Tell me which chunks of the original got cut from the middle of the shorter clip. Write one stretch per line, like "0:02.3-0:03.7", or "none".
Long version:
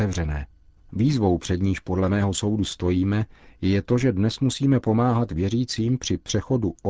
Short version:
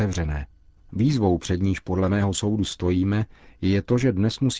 none